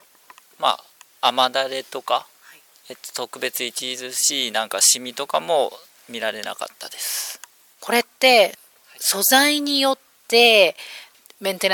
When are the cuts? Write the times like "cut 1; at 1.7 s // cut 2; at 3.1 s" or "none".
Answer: cut 1; at 7.8 s